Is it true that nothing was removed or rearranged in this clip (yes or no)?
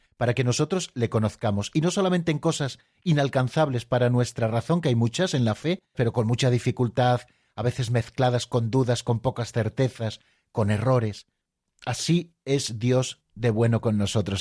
no